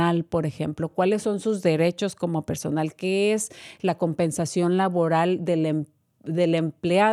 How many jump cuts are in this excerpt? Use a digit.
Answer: 0